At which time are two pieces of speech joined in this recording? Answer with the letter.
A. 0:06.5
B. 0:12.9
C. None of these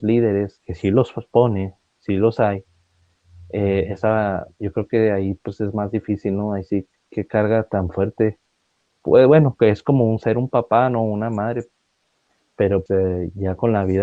B